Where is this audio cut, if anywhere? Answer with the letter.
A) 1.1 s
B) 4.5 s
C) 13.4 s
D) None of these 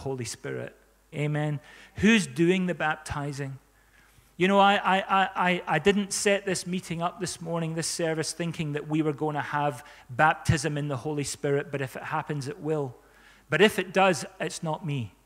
A